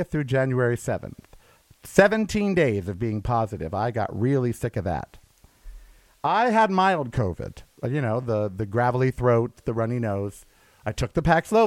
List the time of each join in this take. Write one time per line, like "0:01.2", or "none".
none